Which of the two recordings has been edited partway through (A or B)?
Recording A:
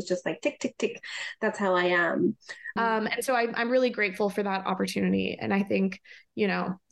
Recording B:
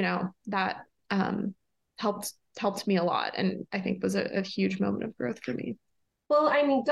A